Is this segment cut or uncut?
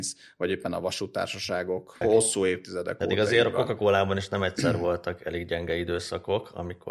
cut